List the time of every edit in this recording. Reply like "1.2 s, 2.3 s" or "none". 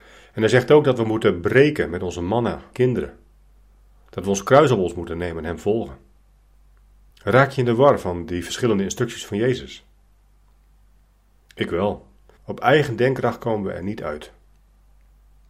2.7 s, 7.1 s, 12.4 s